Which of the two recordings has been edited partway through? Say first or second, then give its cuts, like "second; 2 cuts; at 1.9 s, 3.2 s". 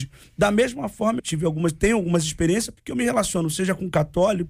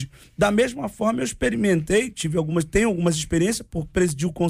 first; 2 cuts; at 1.2 s, 2.8 s